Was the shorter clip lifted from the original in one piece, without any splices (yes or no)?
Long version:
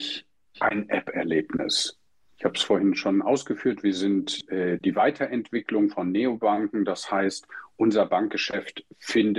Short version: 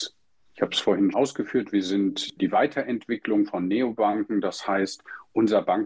no